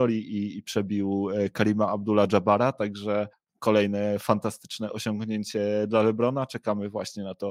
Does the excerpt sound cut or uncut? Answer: uncut